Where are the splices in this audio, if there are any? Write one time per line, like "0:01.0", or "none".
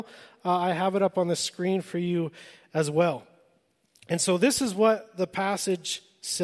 none